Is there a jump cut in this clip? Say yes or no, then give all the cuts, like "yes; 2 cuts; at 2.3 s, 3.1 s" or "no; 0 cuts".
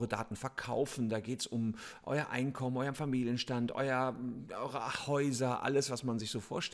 no; 0 cuts